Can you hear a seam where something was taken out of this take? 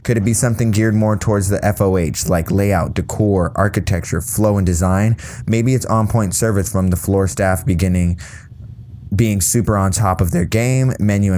no; 0 cuts

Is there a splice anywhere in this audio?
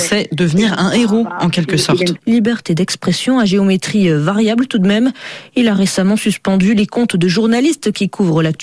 yes; 1 cut; at 2.2 s

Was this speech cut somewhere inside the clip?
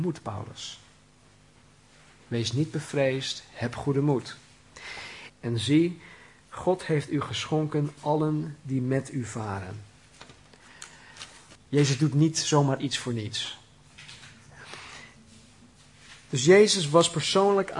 yes; 2 cuts; at 5.3 s, 11.6 s

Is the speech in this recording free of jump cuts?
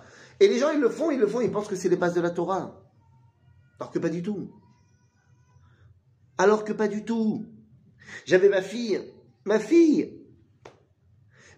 yes; 0 cuts

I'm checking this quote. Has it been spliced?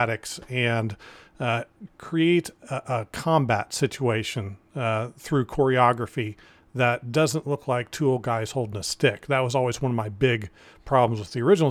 yes; 1 cut; at 1.9 s

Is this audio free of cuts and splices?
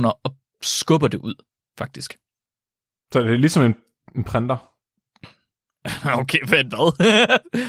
yes; 0 cuts

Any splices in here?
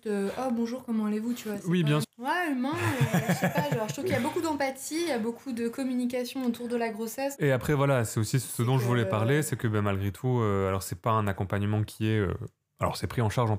yes; 2 cuts; at 2.0 s, 7.4 s

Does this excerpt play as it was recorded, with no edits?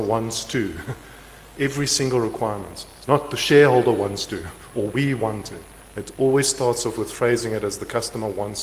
yes; 0 cuts

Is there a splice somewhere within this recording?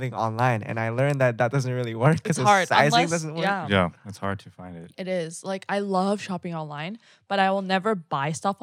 no; 0 cuts

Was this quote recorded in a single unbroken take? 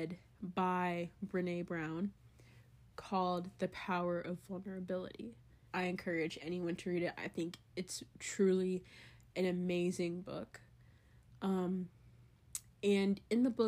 no; 1 cut; at 5.7 s

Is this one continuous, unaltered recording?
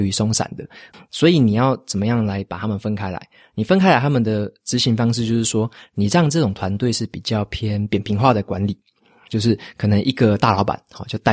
no; 2 cuts; at 0.9 s, 9.3 s

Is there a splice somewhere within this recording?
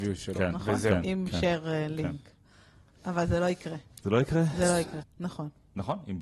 yes; 1 cut; at 5.0 s

